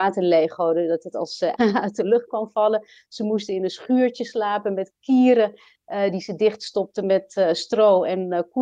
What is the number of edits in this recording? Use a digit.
1